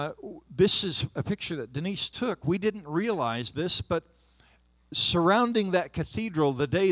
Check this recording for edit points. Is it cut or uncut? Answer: uncut